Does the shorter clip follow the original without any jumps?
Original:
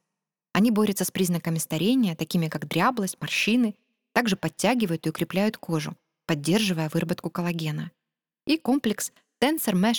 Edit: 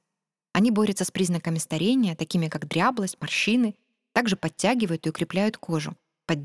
yes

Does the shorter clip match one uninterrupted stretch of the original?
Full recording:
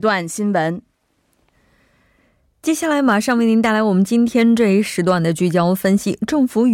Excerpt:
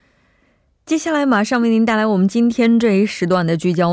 yes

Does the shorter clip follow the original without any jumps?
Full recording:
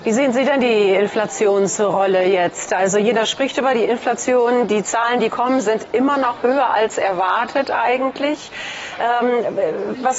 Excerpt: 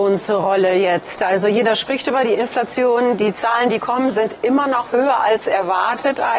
yes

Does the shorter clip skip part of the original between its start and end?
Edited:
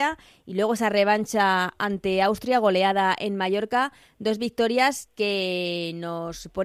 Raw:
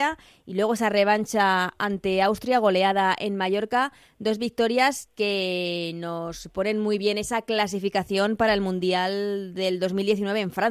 no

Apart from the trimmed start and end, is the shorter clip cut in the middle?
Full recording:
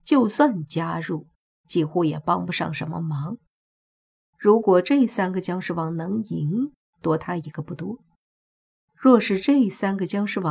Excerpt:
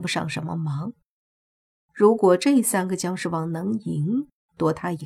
no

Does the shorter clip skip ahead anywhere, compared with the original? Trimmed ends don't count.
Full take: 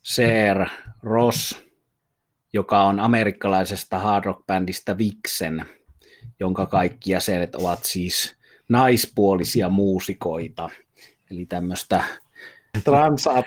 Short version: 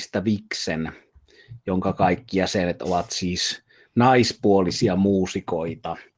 no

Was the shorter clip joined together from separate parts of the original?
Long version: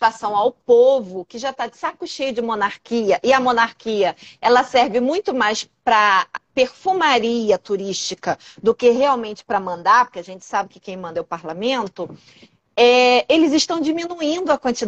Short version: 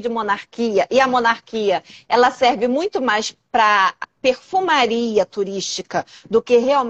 no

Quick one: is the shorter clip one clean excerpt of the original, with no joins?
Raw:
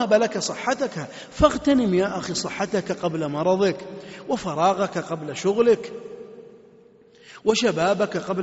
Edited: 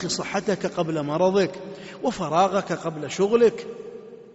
yes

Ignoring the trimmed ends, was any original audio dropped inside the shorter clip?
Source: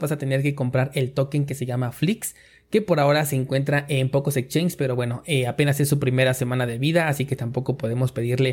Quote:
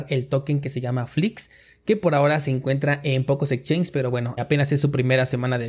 yes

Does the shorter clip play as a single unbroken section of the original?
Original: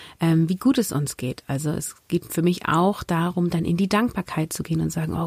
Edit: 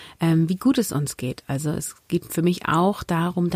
yes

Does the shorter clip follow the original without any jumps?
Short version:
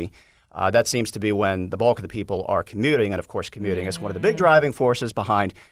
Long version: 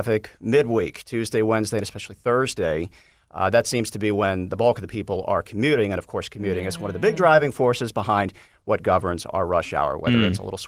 yes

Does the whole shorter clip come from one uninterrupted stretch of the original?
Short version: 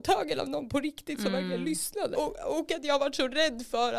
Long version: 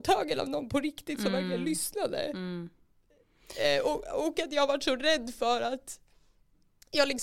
no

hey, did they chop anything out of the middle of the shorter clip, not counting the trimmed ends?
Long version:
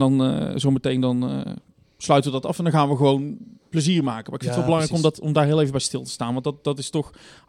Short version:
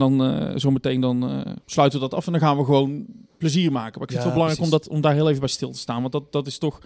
yes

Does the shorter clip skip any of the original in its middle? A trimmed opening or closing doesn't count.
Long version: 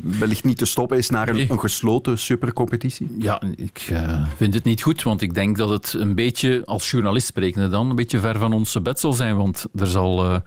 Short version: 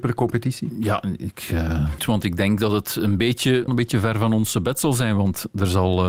yes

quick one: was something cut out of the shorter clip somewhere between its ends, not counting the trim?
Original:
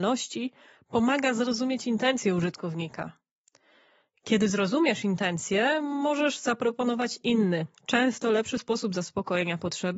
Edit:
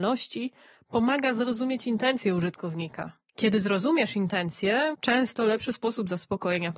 yes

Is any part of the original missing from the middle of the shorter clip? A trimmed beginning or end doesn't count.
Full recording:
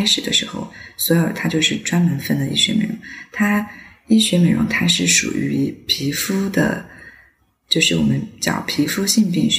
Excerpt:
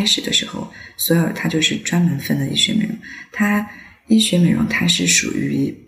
no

